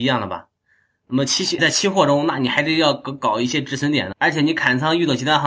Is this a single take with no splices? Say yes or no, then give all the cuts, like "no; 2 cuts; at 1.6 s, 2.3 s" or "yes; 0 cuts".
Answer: no; 2 cuts; at 1.6 s, 4.1 s